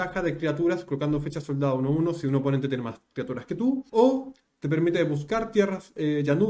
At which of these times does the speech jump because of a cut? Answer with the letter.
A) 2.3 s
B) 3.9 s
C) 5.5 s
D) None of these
B